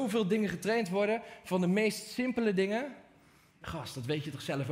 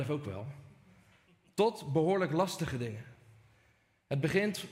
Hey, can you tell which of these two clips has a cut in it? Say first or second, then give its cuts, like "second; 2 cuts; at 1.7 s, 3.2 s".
first; 1 cut; at 3.6 s